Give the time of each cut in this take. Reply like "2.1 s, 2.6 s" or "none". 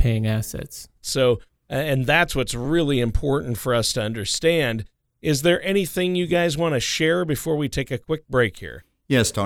1.0 s, 5.0 s